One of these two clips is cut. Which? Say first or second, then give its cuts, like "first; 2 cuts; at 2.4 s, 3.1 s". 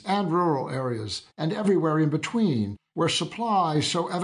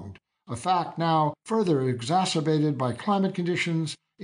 first; 1 cut; at 1.3 s